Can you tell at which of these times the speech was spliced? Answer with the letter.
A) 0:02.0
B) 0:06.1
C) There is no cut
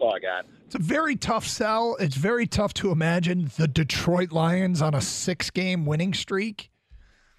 C